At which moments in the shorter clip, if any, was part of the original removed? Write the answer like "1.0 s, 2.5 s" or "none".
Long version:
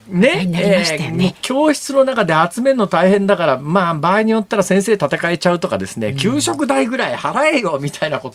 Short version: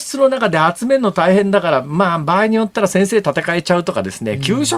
none